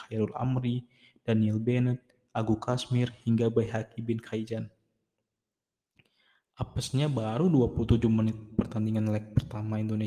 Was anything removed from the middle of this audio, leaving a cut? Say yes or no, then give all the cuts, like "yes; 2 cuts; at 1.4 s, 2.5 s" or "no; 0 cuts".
no; 0 cuts